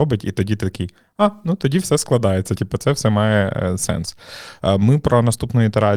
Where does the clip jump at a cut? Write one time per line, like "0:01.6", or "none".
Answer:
none